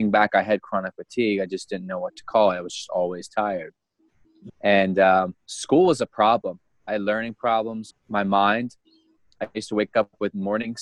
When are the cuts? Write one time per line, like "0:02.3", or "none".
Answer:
0:04.5
0:07.9

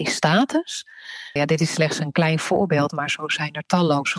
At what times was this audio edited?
0:01.4

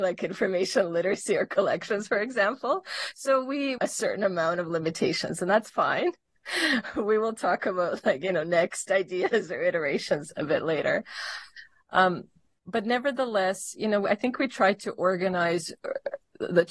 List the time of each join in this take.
0:03.8

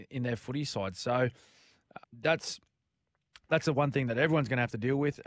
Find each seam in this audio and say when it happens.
0:02.0

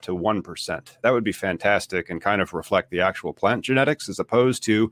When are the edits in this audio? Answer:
none

